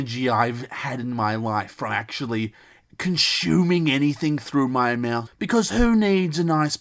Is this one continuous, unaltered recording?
no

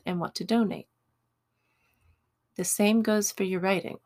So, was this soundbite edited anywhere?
no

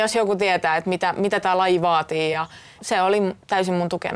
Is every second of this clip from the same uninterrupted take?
yes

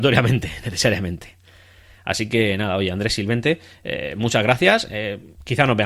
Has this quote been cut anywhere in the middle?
yes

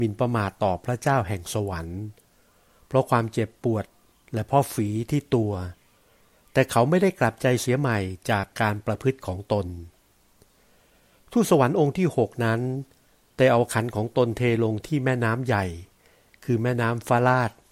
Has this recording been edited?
no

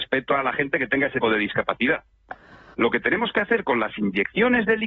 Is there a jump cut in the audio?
yes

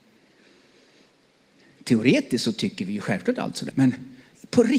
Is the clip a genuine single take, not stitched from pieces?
no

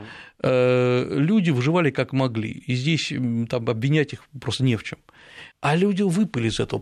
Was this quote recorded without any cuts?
no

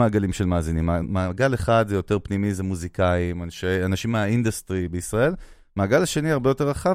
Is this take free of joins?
yes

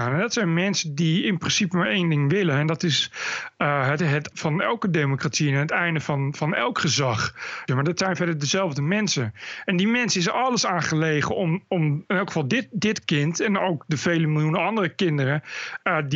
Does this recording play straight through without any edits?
no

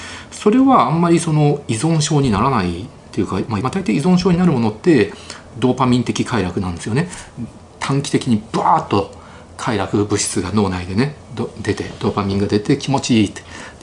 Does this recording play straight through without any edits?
no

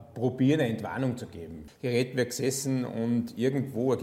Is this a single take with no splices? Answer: no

